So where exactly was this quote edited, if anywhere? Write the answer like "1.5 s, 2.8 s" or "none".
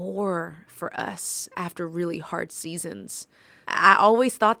3.6 s